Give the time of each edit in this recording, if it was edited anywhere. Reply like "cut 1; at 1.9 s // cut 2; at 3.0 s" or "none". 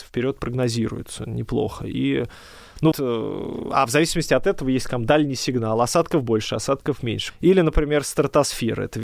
cut 1; at 2.9 s // cut 2; at 7.3 s